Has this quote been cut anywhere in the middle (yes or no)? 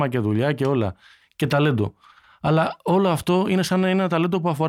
no